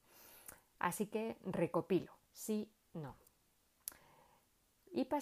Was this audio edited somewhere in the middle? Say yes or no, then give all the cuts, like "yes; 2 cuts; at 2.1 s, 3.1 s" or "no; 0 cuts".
yes; 1 cut; at 2.3 s